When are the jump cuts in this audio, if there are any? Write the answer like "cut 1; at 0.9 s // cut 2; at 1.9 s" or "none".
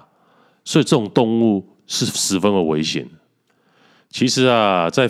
none

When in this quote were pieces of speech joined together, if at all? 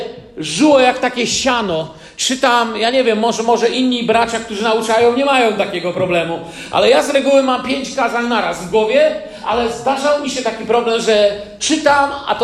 none

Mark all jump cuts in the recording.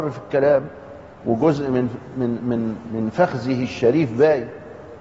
none

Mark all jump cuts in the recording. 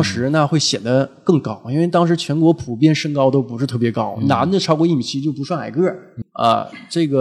cut 1; at 6.2 s

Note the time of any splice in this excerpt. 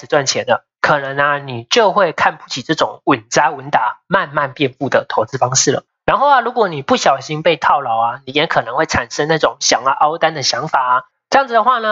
none

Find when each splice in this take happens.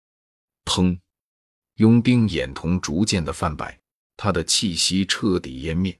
cut 1; at 1.6 s // cut 2; at 4.1 s

